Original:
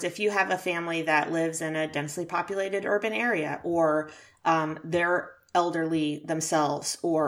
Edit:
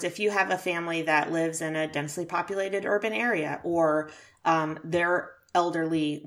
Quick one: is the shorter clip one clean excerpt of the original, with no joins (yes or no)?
yes